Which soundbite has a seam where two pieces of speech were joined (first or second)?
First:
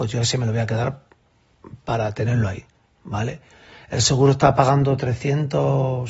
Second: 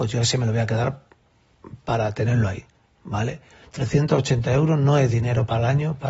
second